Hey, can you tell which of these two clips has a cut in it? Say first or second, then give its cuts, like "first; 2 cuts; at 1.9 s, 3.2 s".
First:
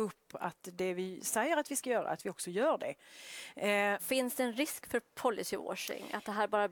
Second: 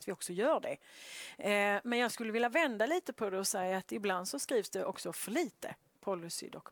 first; 1 cut; at 4.0 s